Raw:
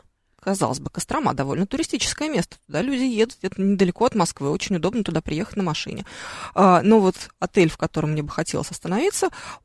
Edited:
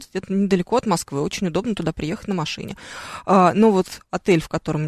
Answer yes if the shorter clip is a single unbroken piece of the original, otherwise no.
yes